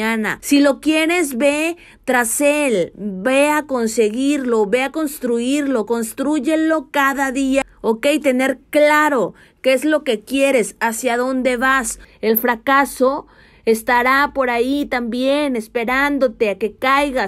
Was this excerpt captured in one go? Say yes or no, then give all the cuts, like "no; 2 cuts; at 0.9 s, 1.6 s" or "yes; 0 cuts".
yes; 0 cuts